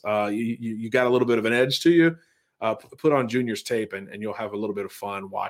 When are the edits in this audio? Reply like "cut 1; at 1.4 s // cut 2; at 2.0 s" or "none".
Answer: none